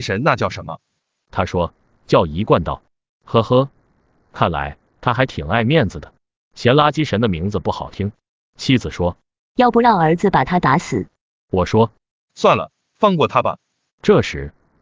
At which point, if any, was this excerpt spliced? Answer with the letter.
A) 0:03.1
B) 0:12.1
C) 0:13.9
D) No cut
C